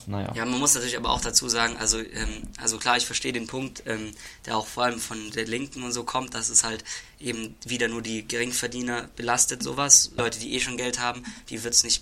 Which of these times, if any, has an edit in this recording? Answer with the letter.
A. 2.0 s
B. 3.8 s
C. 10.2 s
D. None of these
C